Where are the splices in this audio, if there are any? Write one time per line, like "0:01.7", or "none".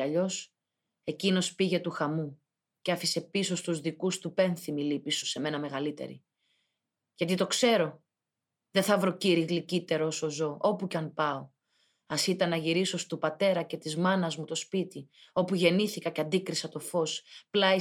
0:05.2